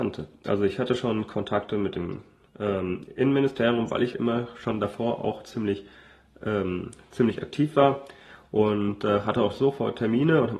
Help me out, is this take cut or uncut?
cut